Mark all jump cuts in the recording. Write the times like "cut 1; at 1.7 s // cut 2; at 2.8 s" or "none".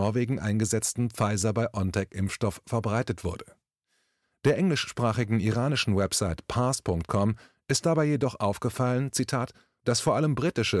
none